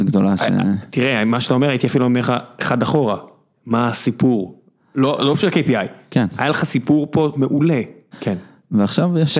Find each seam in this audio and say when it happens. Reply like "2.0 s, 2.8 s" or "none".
8.1 s